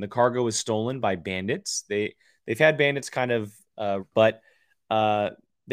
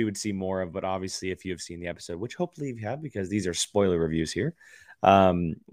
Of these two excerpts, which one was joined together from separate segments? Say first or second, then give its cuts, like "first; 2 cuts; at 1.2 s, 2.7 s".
first; 1 cut; at 4.0 s